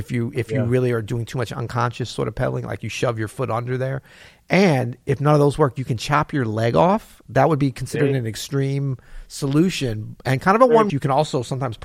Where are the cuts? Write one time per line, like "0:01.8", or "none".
0:10.9